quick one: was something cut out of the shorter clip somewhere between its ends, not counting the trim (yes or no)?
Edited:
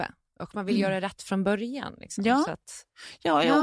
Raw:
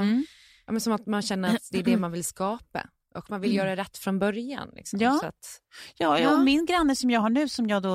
no